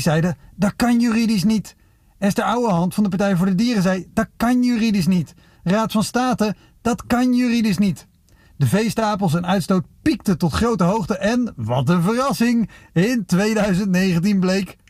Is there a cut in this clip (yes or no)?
yes